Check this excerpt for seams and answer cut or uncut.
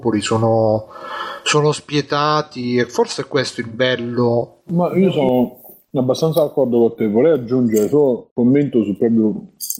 cut